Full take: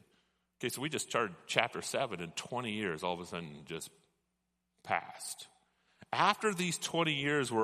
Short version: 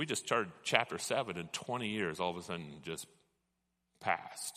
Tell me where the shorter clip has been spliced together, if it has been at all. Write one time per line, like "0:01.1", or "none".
none